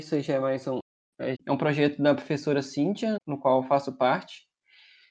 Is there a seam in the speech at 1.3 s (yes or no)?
yes